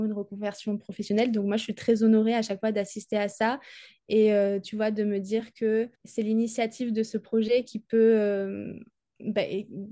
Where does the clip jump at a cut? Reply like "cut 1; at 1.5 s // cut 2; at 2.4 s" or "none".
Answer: cut 1; at 5.9 s